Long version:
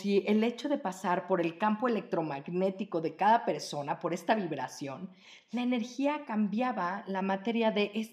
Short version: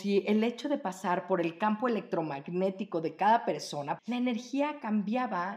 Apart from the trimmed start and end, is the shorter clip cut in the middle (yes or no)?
yes